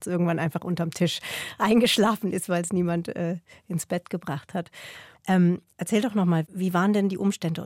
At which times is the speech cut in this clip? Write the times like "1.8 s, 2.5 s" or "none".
5.1 s